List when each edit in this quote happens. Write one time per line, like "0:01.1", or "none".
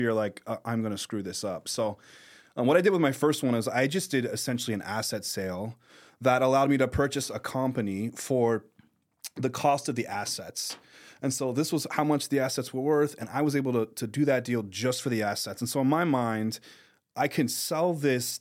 none